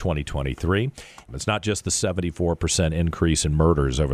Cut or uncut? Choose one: cut